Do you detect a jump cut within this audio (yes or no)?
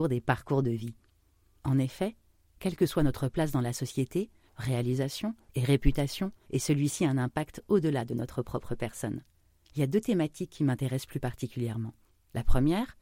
yes